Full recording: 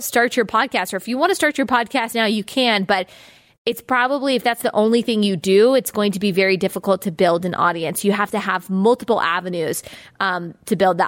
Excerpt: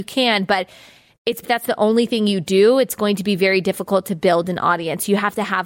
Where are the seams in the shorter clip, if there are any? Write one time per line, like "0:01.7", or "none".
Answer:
0:01.4